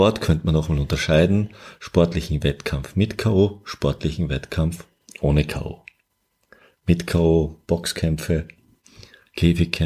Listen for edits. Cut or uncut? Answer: uncut